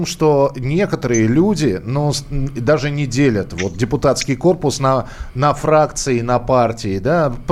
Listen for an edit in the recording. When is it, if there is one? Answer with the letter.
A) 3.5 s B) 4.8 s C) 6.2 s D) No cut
D